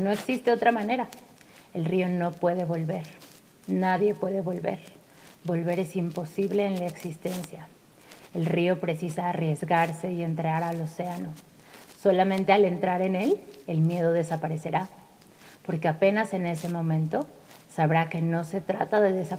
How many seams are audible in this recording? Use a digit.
0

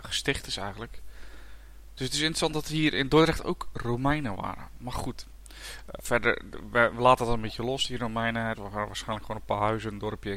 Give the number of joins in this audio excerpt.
2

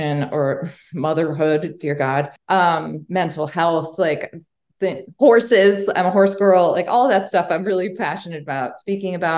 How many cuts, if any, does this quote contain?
1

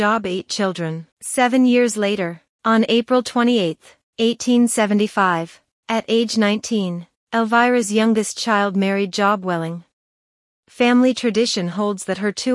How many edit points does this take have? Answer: 2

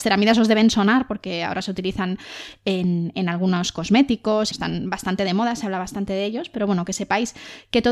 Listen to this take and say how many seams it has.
1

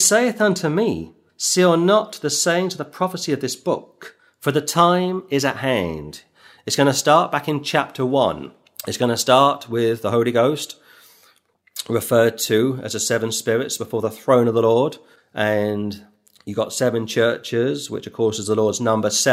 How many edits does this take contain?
1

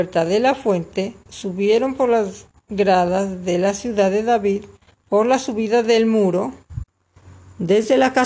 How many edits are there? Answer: 1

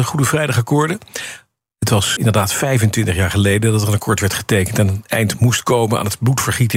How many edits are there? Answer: 1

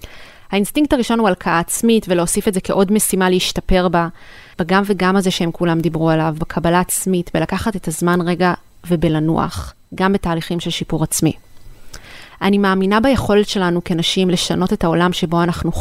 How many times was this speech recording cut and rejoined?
1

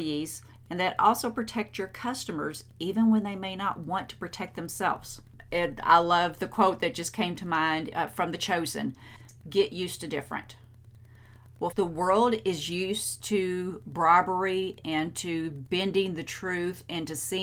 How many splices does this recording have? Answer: 1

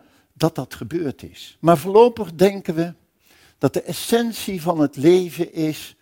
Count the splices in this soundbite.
0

